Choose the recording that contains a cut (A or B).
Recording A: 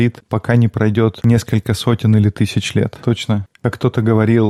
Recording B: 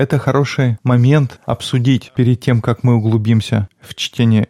B